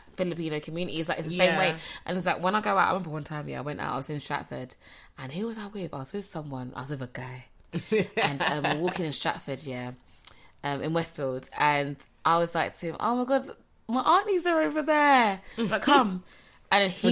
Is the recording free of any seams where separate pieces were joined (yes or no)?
yes